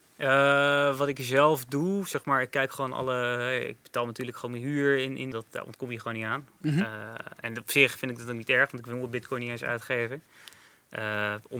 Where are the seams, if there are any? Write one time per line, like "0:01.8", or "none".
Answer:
0:05.3